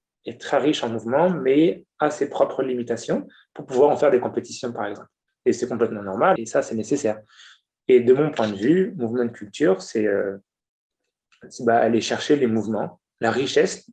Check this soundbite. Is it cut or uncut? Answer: cut